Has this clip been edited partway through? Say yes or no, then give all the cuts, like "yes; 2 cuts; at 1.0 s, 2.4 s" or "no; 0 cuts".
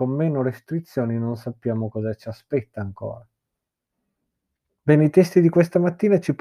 no; 0 cuts